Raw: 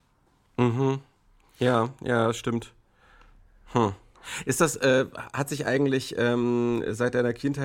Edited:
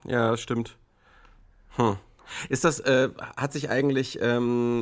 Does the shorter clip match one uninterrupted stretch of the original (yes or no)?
yes